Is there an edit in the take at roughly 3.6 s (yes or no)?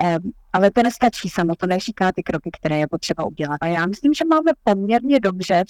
yes